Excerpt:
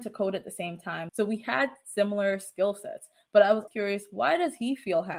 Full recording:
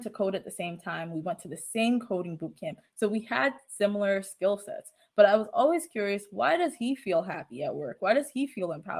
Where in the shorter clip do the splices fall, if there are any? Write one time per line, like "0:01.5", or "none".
0:01.1
0:03.7